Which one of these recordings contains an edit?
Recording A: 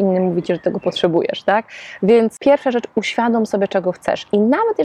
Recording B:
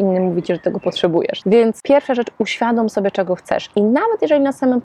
B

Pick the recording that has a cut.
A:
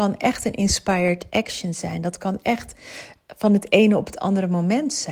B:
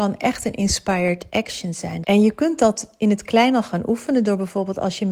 B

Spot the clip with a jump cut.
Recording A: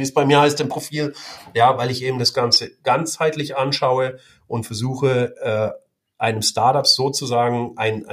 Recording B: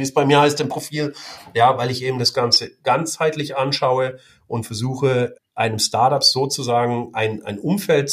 B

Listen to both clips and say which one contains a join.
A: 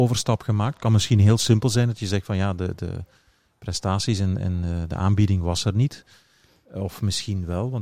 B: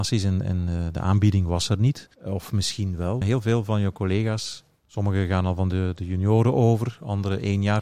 B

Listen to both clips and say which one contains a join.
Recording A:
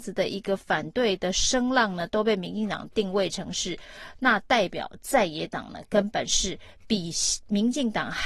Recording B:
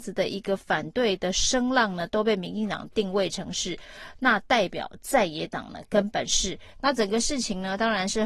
B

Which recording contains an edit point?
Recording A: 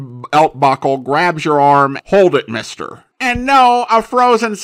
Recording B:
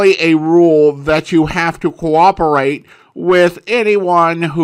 A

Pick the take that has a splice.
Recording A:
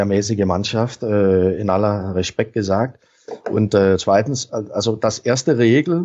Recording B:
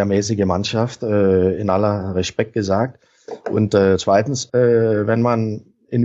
B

